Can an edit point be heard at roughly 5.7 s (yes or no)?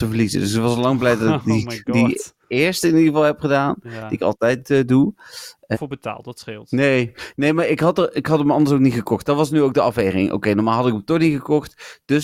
yes